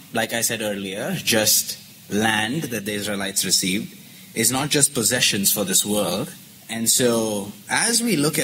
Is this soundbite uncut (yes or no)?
no